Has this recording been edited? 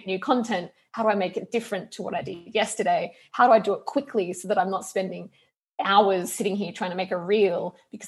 no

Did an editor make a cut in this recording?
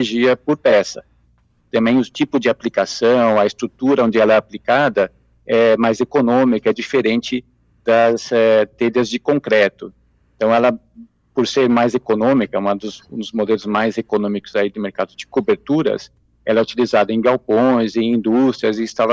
no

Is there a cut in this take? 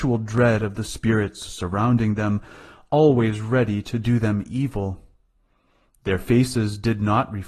no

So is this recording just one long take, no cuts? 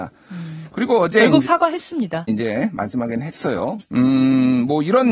no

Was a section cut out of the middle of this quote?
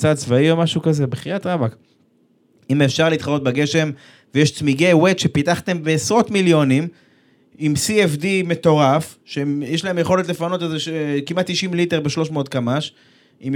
no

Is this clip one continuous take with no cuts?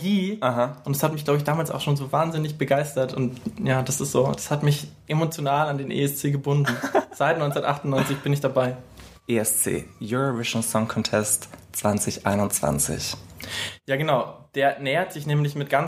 no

